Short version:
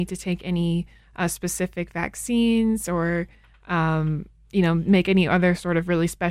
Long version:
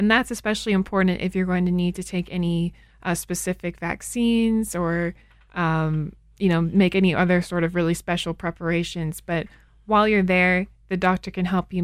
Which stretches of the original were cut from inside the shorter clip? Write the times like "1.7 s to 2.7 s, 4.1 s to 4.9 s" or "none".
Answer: none